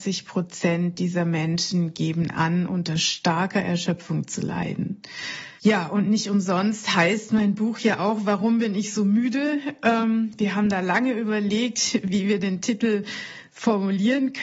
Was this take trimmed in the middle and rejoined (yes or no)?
yes